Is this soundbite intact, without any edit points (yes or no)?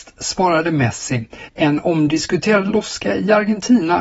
no